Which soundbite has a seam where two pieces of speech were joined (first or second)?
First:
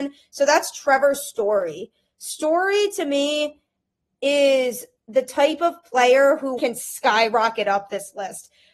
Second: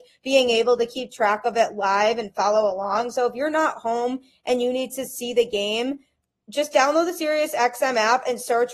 first